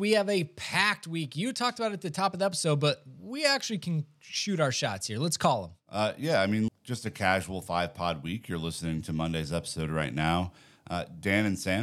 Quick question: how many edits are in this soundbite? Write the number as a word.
one